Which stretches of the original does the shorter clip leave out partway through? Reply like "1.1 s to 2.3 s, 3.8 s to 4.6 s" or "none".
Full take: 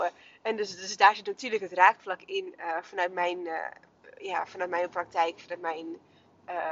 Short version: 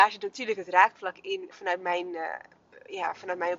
2.5 s to 2.8 s